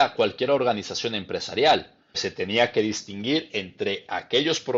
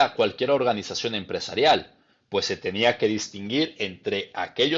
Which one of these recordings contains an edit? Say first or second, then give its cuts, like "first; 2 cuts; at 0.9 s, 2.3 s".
first; 1 cut; at 2.1 s